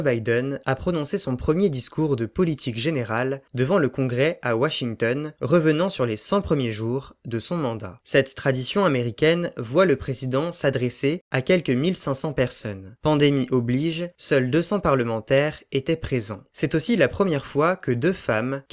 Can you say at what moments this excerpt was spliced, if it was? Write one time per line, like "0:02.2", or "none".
none

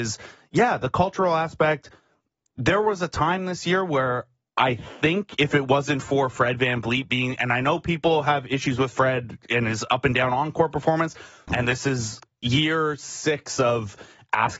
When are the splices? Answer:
0:11.5

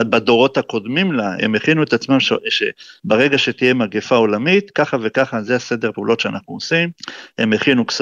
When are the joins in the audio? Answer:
0:01.4

